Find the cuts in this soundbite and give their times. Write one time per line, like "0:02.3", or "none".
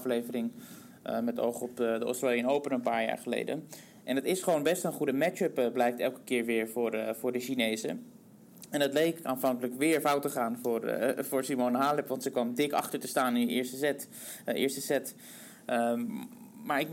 none